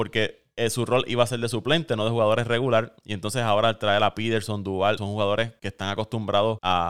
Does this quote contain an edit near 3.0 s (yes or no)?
no